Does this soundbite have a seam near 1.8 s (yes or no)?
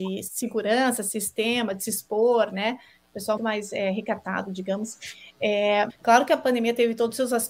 no